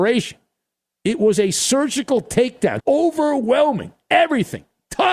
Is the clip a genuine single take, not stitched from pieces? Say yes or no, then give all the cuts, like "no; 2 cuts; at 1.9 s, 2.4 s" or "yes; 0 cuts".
no; 1 cut; at 2.8 s